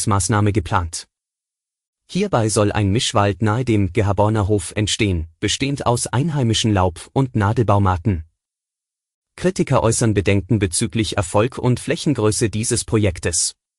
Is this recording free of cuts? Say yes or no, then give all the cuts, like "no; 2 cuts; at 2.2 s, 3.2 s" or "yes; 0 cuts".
yes; 0 cuts